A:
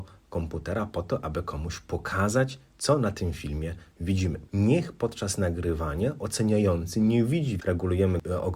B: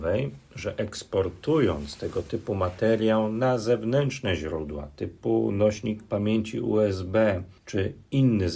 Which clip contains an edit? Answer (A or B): A